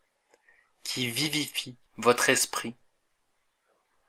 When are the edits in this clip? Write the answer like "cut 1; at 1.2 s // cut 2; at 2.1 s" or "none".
cut 1; at 1.9 s